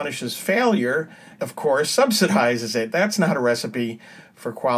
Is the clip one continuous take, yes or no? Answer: no